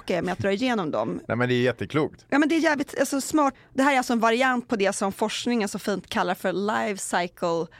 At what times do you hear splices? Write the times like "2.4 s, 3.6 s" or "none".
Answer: 3.5 s